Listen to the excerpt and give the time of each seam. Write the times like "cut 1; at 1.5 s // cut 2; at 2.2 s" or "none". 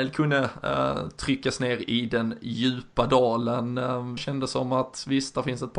cut 1; at 4.2 s